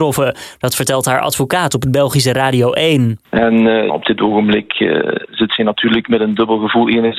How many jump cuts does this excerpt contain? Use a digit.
1